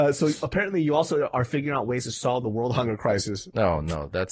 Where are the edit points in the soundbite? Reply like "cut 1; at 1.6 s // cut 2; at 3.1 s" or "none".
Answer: none